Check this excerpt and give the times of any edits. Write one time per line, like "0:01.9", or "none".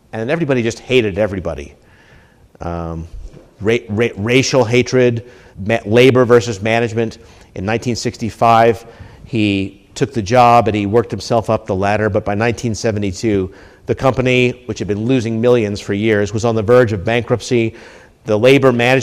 0:05.5